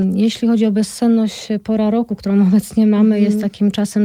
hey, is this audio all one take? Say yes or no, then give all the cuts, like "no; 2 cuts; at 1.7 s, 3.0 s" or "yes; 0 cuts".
yes; 0 cuts